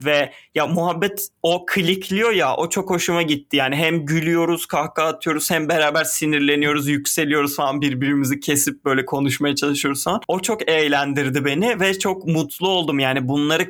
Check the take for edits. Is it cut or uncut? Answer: cut